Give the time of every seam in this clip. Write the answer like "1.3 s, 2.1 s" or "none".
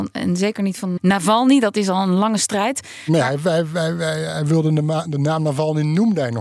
1.0 s